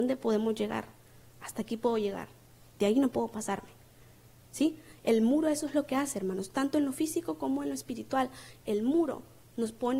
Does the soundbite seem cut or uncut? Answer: uncut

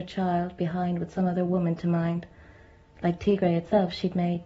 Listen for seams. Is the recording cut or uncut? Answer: uncut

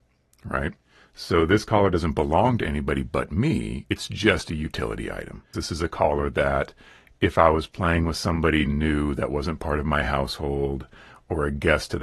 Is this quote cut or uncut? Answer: cut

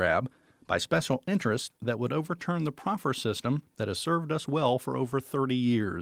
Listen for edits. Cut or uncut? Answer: uncut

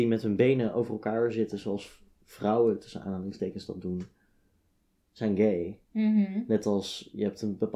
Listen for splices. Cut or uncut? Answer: uncut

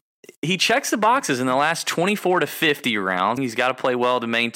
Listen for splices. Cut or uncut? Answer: cut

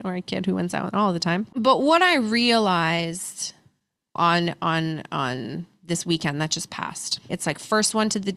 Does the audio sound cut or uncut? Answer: cut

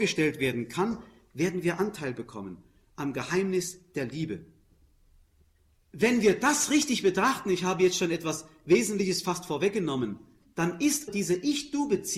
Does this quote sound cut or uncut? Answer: cut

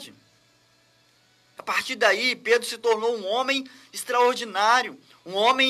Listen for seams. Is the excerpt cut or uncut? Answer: cut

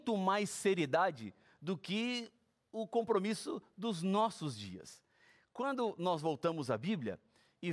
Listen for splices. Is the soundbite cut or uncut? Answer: uncut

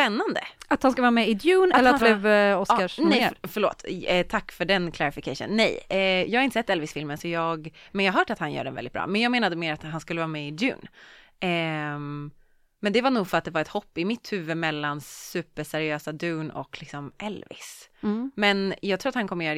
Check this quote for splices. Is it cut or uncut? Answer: cut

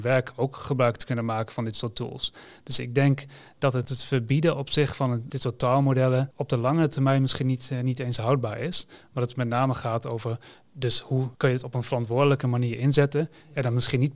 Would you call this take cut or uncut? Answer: uncut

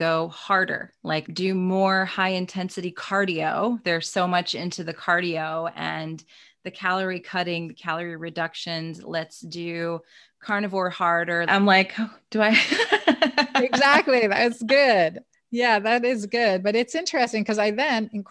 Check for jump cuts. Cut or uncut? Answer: cut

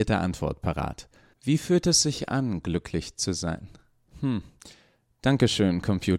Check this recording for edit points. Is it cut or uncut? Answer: cut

